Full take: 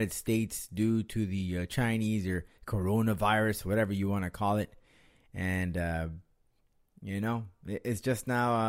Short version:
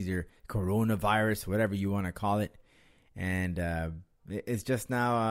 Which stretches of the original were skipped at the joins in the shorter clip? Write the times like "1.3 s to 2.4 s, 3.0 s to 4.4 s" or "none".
6.4 s to 7.6 s